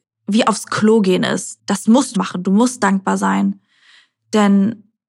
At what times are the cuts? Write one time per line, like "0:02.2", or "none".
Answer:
0:02.1